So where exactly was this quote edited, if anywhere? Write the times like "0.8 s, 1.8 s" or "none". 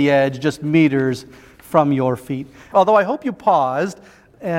2.7 s